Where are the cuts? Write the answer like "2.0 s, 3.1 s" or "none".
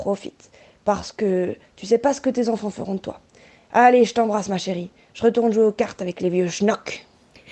none